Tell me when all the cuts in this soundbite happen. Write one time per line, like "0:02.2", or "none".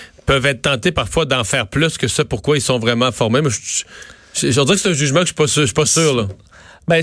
none